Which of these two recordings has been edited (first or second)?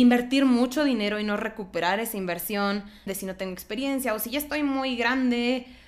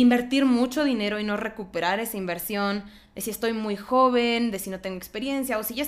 first